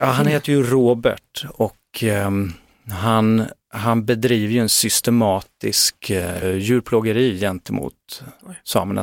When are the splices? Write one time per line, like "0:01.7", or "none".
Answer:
0:06.4